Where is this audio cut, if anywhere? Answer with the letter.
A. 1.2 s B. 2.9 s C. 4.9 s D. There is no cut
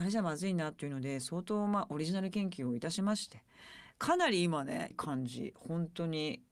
C